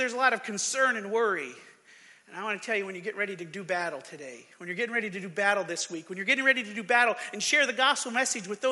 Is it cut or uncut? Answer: uncut